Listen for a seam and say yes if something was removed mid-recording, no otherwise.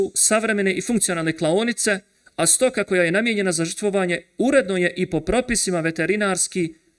no